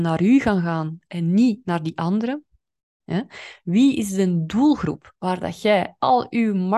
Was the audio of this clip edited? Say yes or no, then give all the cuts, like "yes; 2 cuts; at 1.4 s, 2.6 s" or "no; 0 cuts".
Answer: yes; 1 cut; at 3.0 s